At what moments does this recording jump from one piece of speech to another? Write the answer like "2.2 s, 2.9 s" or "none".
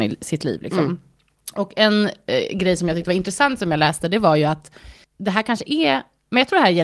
5.0 s